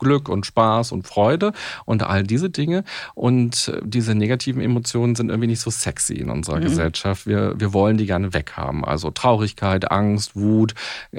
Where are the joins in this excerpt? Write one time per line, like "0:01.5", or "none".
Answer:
none